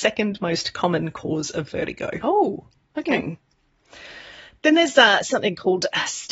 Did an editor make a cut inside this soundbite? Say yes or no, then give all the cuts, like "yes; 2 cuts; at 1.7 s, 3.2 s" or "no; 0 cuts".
no; 0 cuts